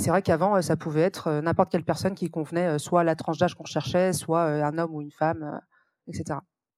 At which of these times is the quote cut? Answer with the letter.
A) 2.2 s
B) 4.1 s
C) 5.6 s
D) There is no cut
D